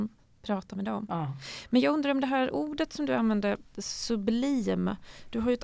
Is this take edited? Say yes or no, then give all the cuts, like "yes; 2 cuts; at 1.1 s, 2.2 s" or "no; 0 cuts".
yes; 1 cut; at 3.7 s